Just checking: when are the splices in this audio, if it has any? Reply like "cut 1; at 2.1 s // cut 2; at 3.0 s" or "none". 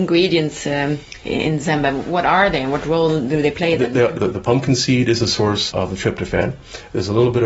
cut 1; at 4.2 s // cut 2; at 5.7 s